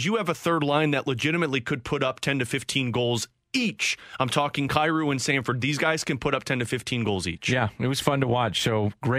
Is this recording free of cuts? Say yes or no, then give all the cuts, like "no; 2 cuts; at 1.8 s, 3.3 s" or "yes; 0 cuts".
yes; 0 cuts